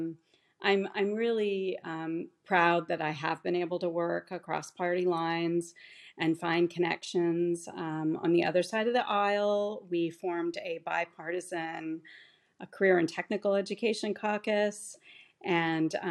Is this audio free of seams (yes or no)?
yes